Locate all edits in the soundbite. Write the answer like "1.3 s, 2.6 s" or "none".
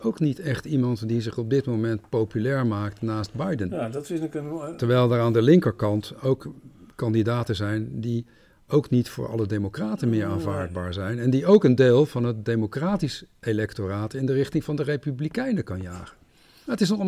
none